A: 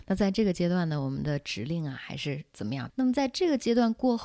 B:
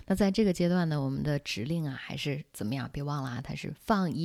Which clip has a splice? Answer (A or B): A